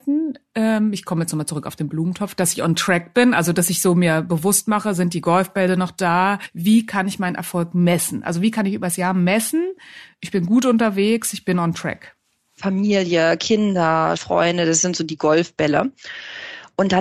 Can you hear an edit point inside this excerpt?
yes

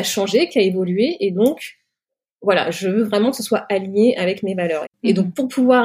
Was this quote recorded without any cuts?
no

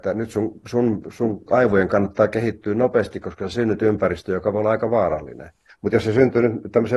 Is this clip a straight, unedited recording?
no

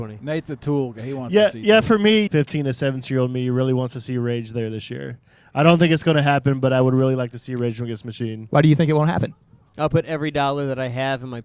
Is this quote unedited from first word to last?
no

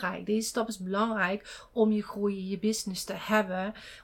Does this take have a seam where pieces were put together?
no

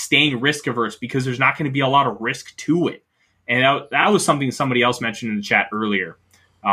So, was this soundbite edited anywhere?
no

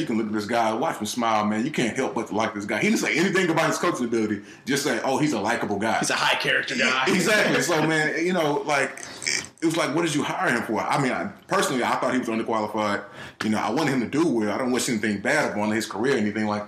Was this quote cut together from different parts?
no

